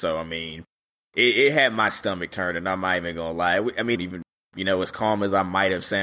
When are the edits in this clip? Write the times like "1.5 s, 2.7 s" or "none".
4.0 s